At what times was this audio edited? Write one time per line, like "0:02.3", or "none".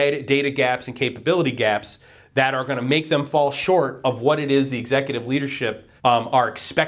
0:06.0